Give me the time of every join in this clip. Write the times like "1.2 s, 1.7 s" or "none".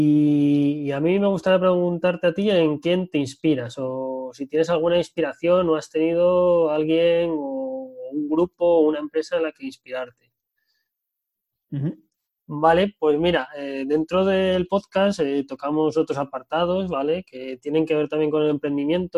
12.4 s

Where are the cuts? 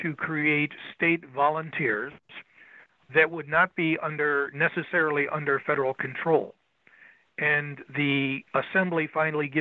3.1 s

